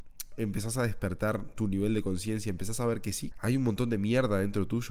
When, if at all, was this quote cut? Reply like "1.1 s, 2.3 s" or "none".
3.3 s

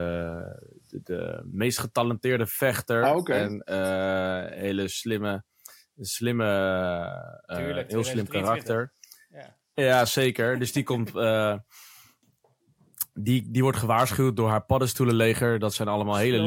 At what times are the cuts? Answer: none

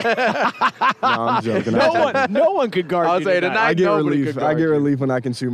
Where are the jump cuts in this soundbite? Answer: none

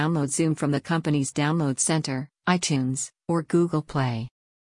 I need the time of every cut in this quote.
none

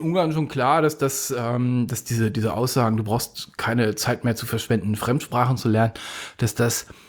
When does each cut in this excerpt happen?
none

